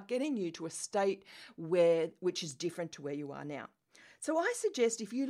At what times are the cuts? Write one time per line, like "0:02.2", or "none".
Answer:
none